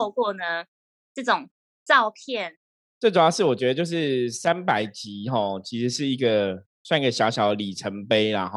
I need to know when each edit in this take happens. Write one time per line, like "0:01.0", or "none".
0:02.8